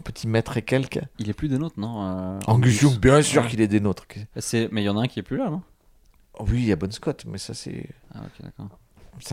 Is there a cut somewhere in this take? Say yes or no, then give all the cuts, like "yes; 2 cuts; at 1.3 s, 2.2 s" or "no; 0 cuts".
no; 0 cuts